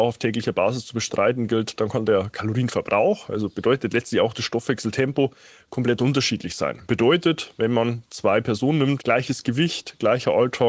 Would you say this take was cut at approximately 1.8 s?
no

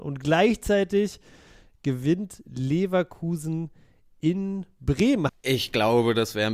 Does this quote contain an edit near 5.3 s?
yes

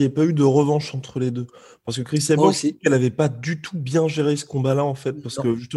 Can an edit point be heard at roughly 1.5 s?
no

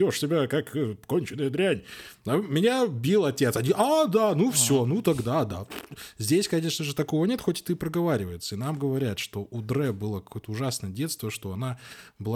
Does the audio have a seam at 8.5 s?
no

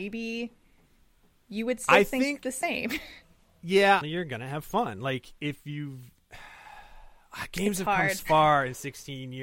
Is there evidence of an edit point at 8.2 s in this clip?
yes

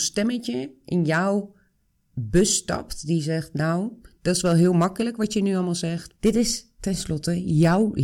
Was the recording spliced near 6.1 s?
yes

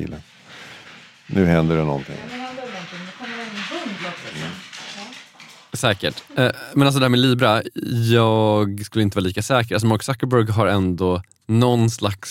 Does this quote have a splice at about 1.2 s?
no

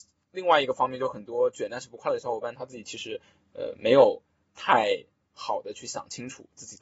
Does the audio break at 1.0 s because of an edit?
no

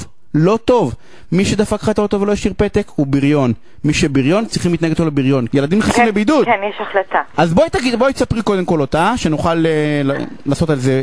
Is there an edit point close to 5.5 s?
yes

